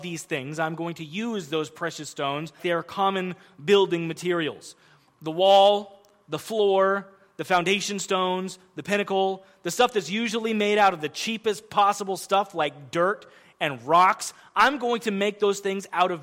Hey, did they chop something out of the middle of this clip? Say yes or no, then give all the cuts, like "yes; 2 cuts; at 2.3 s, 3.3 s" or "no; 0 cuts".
yes; 1 cut; at 2.6 s